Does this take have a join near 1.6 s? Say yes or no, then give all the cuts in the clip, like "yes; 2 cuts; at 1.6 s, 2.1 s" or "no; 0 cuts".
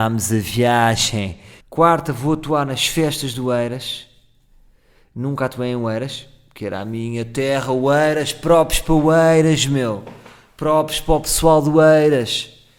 yes; 1 cut; at 1.6 s